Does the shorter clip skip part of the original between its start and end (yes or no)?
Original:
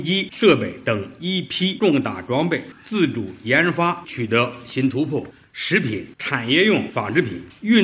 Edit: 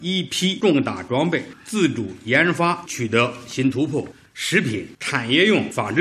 no